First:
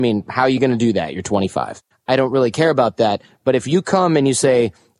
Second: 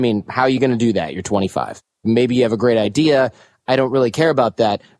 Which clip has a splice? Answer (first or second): first